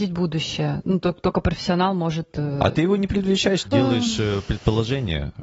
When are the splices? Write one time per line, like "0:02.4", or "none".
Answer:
0:03.6